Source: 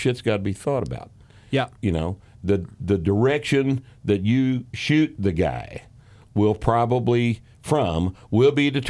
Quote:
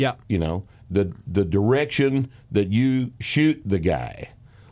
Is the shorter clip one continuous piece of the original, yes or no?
yes